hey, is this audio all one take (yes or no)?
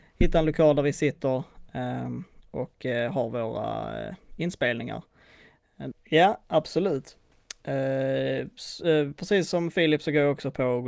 no